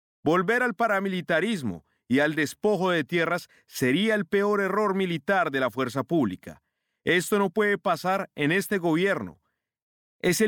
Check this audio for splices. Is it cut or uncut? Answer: uncut